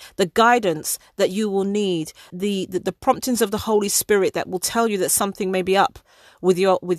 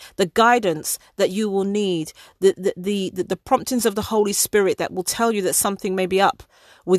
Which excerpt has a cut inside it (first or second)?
first